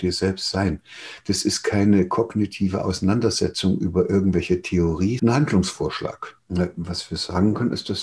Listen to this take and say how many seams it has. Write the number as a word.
two